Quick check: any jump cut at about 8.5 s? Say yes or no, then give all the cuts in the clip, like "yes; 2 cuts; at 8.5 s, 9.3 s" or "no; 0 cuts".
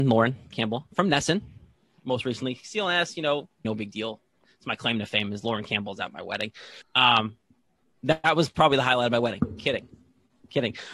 no; 2 cuts; at 3.6 s, 6.8 s